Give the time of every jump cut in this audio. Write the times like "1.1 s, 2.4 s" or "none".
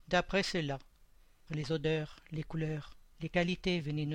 1.5 s, 3.1 s